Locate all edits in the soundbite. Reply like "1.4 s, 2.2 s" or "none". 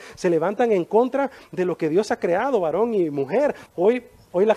3.7 s